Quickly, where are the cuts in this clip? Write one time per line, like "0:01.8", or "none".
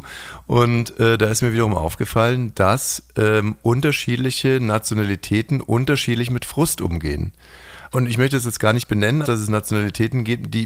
0:07.9
0:09.2